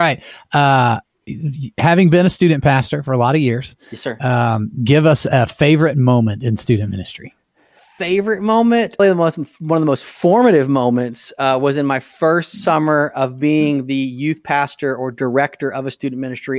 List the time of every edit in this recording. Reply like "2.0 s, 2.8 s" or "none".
9.0 s